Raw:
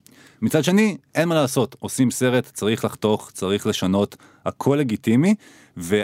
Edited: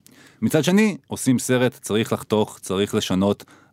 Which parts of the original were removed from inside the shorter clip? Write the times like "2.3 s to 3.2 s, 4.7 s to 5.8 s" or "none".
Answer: 1.1 s to 1.8 s